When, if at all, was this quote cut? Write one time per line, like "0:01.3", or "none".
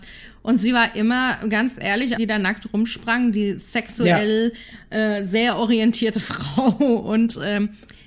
0:02.2

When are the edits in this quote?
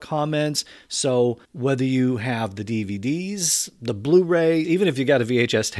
0:01.4
0:04.6

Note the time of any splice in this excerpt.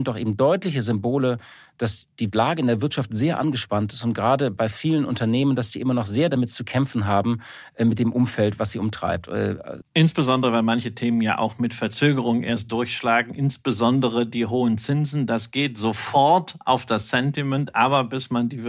0:09.8

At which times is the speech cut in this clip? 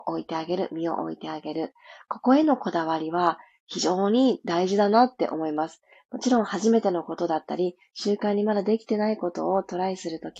none

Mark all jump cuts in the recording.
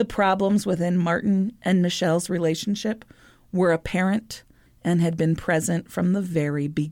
0:04.7

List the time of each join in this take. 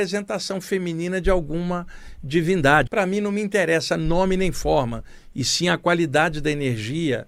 0:02.9

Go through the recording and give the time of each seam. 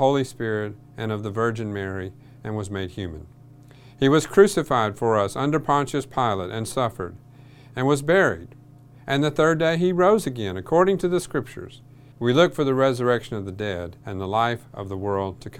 0:12.1
0:14.0

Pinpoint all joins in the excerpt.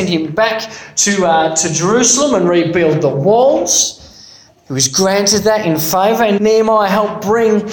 0:06.4

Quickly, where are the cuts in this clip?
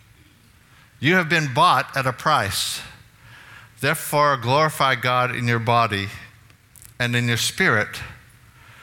none

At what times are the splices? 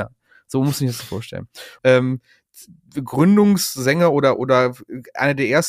0:01.8

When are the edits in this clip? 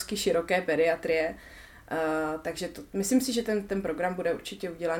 none

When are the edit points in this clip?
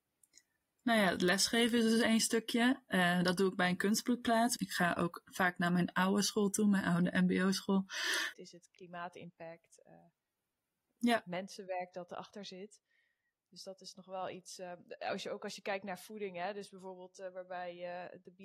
0:04.6
0:08.3

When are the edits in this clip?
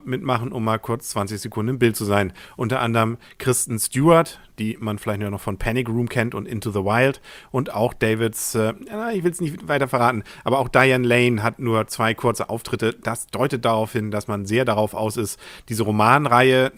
none

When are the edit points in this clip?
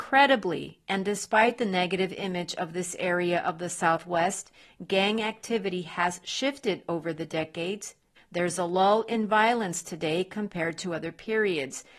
0:08.2

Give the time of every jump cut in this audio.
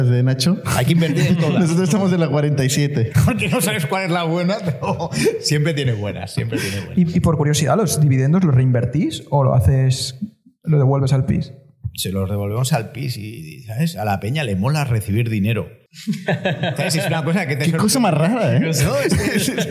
0:03.1

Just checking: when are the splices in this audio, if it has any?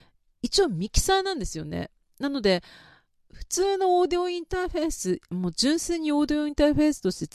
none

